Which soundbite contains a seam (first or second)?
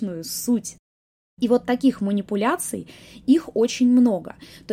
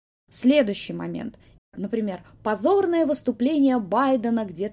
second